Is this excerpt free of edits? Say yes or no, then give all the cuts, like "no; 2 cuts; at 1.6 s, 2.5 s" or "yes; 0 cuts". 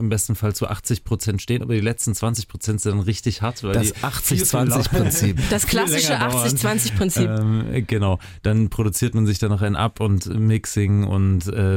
yes; 0 cuts